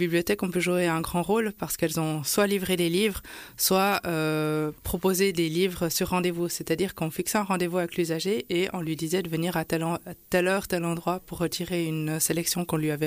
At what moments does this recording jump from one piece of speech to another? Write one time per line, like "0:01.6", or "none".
none